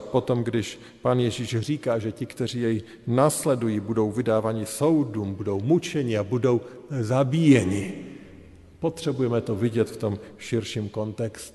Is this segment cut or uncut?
uncut